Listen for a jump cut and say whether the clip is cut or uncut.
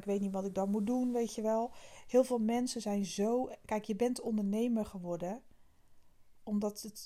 uncut